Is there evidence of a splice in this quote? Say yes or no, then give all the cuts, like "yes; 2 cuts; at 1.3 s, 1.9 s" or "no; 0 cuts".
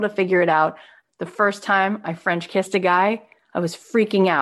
yes; 1 cut; at 1.0 s